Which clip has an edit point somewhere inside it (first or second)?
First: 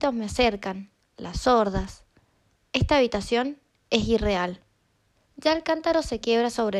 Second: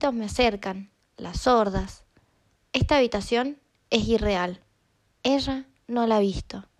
first